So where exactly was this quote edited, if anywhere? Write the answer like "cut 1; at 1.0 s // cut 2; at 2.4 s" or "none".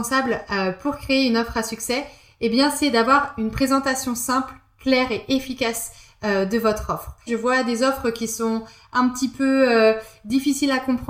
cut 1; at 7.3 s